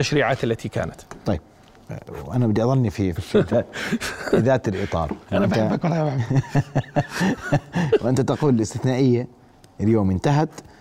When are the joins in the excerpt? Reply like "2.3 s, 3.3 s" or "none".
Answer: 3.2 s, 5.2 s